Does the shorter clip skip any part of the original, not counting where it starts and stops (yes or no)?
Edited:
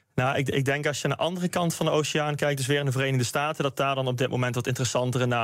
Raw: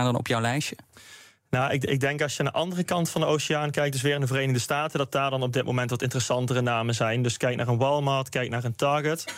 no